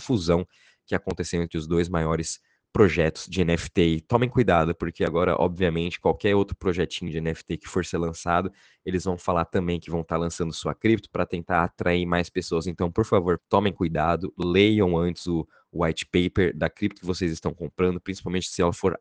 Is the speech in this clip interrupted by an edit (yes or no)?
yes